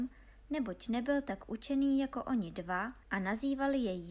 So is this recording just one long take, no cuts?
no; 1 cut; at 3.0 s

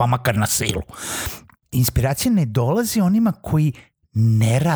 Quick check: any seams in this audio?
yes; 1 cut; at 1.6 s

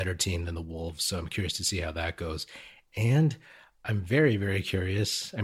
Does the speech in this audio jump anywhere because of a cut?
no; 0 cuts

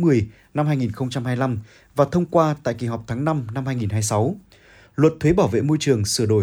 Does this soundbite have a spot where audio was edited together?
no; 0 cuts

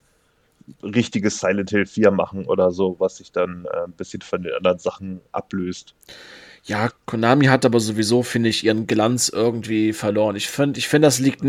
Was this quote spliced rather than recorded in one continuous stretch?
yes; 1 cut; at 6.9 s

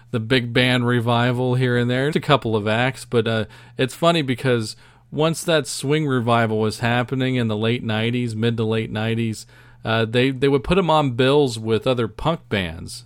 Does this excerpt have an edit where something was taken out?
yes; 1 cut; at 2.1 s

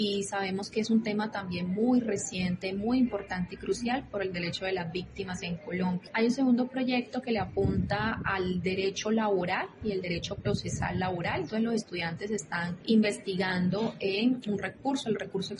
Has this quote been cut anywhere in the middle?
no; 0 cuts

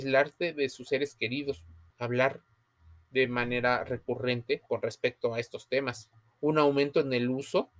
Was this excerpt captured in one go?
no; 2 cuts; at 1.9 s, 4.7 s

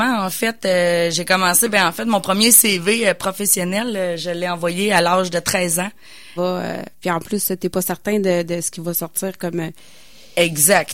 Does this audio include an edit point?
yes; 1 cut; at 6.4 s

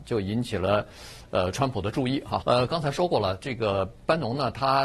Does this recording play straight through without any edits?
no; 1 cut; at 2.4 s

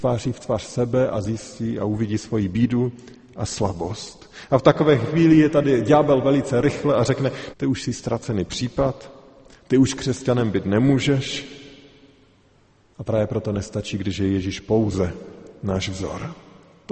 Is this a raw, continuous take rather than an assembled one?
no; 1 cut; at 7.5 s

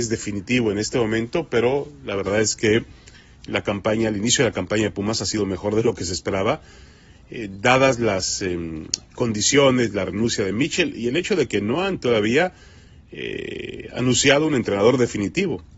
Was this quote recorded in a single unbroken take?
yes; 0 cuts

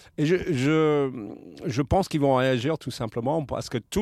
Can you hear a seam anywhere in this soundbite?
no; 0 cuts

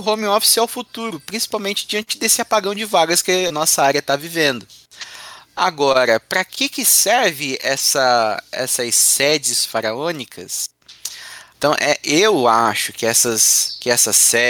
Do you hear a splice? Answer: yes; 2 cuts; at 3.5 s, 11.5 s

